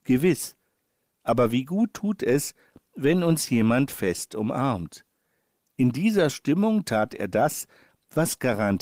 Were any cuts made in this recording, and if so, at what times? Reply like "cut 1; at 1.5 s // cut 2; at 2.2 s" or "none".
cut 1; at 5.6 s